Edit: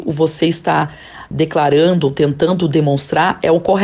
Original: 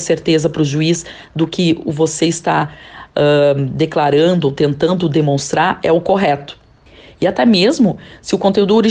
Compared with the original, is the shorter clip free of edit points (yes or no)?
no